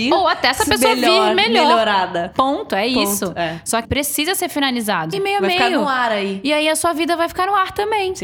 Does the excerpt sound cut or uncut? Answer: cut